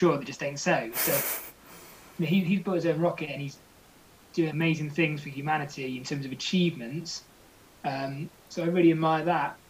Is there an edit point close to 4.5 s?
yes; 1 cut; at 4.5 s

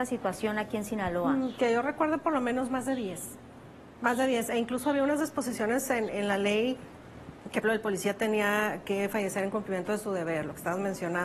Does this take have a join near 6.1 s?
yes; 2 cuts; at 6.1 s, 7.6 s

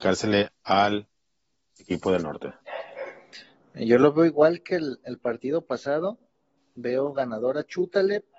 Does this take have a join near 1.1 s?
no; 0 cuts

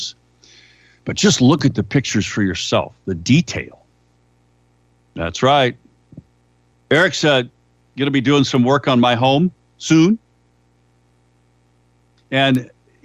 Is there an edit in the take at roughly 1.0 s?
no; 2 cuts; at 4.9 s, 6.7 s

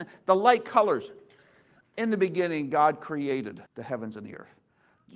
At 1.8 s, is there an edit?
yes; 2 cuts; at 1.8 s, 3.7 s

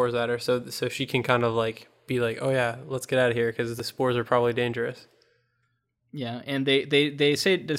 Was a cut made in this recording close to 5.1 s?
no; 0 cuts

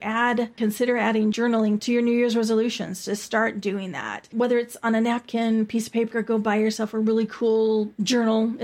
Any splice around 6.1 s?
yes; 1 cut; at 6.1 s

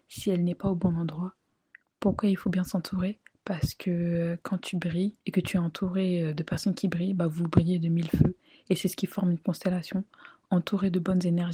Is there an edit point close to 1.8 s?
yes; 2 cuts; at 1.8 s, 5.2 s

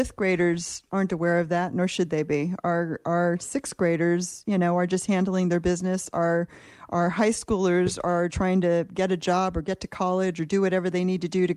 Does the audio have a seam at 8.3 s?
yes; 1 cut; at 8.3 s

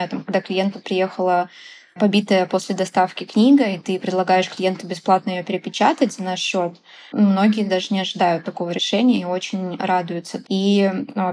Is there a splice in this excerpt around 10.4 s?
yes; 1 cut; at 10.4 s

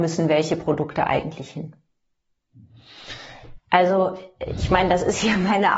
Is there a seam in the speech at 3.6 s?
yes; 1 cut; at 3.6 s

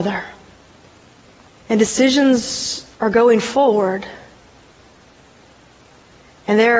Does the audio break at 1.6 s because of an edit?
yes; 2 cuts; at 1.6 s, 2.9 s

